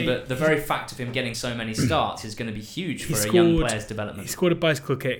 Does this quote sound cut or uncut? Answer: uncut